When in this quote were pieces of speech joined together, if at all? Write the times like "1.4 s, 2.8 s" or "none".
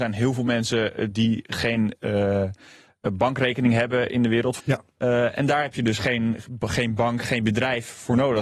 4.6 s